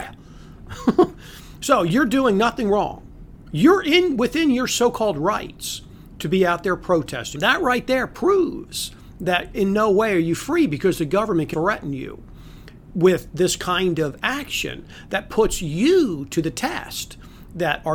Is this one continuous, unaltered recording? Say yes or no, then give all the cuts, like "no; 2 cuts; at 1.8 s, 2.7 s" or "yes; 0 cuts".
no; 2 cuts; at 7.3 s, 11.5 s